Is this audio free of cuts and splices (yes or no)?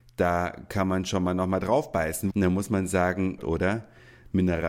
no